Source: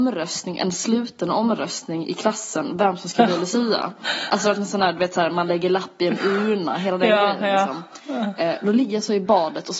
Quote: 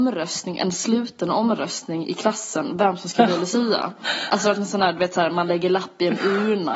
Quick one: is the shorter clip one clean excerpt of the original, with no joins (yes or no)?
yes